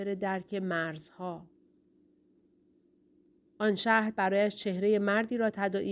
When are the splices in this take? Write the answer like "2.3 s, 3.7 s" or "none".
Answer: 3.4 s